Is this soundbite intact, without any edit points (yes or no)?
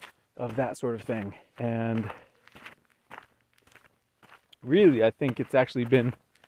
no